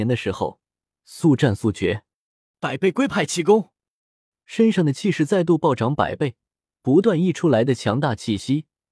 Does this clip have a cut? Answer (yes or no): yes